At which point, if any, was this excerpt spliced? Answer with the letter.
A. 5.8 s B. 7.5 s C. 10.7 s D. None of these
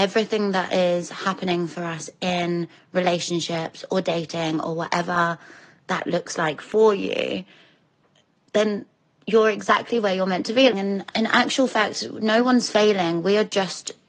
C